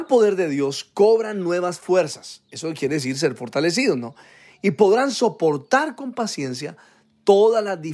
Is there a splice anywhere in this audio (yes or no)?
no